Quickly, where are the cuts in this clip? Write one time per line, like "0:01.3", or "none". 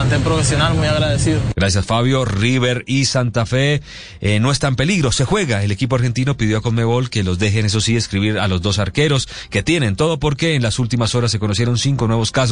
0:01.5